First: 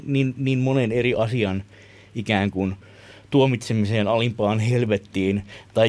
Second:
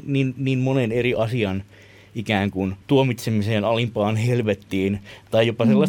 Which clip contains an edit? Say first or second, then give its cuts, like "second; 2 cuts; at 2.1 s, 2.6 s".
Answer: second; 1 cut; at 2.8 s